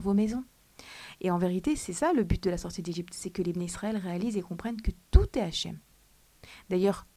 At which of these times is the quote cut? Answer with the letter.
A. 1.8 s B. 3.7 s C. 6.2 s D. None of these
D